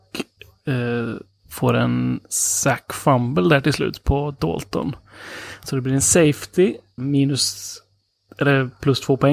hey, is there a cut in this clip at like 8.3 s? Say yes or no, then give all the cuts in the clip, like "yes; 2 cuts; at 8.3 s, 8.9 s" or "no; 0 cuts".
no; 1 cut; at 7.0 s